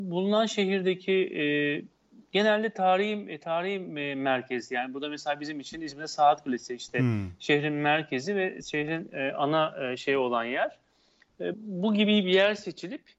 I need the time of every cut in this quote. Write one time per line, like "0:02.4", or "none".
0:11.5